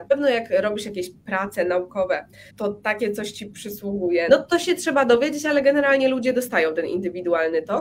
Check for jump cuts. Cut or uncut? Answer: cut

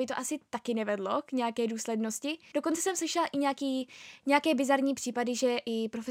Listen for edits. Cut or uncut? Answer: cut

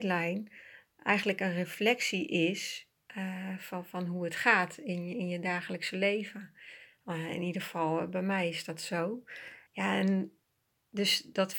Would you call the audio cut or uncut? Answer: cut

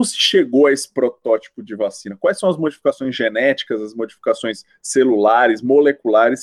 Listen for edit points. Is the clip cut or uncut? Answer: uncut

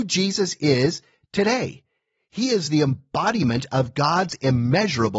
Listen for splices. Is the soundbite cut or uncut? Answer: uncut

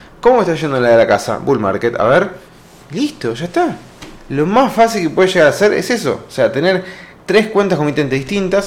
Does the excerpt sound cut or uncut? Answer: uncut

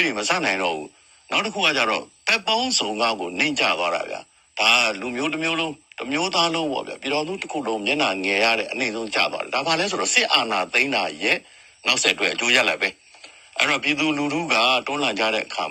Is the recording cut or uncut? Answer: uncut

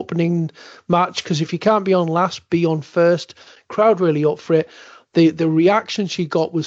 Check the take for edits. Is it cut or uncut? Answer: uncut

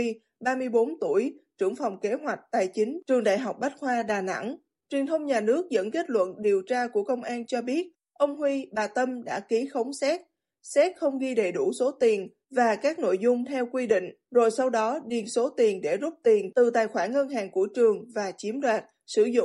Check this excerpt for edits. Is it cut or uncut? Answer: cut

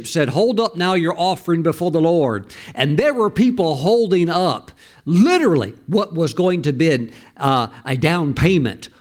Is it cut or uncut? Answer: uncut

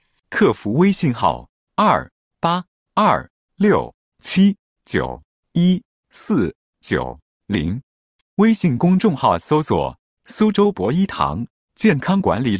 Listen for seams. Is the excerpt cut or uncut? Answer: uncut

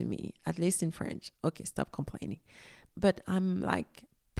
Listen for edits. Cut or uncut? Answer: uncut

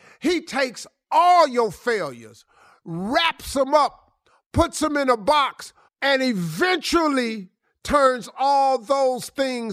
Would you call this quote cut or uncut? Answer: cut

